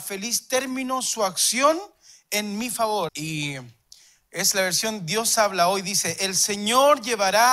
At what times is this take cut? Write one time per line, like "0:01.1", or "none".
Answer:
0:03.1